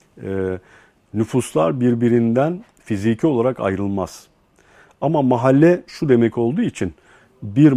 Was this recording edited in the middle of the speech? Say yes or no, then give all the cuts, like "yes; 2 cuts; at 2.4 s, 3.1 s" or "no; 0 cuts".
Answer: no; 0 cuts